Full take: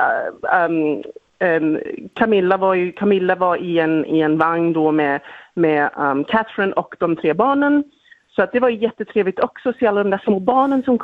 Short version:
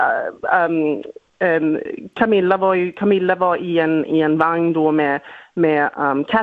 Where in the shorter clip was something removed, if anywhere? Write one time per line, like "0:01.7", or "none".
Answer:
none